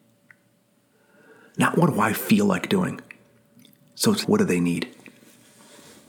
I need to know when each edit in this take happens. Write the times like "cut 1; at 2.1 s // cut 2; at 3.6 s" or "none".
cut 1; at 4.2 s